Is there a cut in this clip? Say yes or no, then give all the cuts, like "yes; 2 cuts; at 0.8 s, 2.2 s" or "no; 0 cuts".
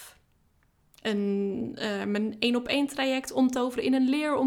no; 0 cuts